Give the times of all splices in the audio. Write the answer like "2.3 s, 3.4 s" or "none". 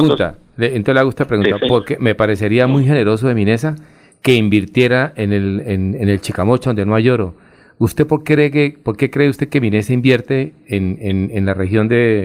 none